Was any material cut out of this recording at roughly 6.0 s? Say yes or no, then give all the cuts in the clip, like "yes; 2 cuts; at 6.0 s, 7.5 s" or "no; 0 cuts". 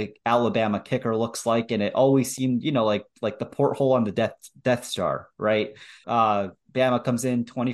yes; 1 cut; at 6.0 s